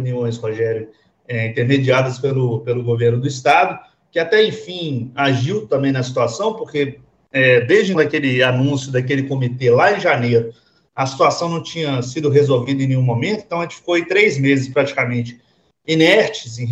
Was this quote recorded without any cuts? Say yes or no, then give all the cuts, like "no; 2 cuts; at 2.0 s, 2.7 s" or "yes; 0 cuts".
no; 1 cut; at 7.9 s